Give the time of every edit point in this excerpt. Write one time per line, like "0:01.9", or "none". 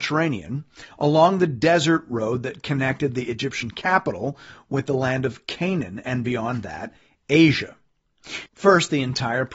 0:08.5